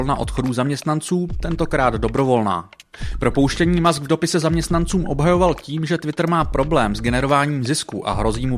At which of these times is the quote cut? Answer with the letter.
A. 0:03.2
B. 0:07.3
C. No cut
C